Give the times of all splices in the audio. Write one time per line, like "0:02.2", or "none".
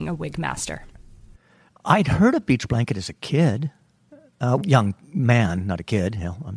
0:04.6